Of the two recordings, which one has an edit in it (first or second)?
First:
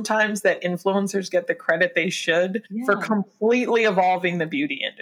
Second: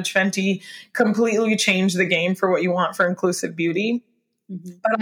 first